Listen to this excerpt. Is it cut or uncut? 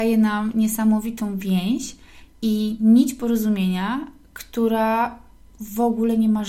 uncut